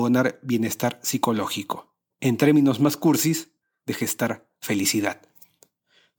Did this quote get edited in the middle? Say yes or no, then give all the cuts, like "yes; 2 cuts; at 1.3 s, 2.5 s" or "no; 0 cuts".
yes; 1 cut; at 2.1 s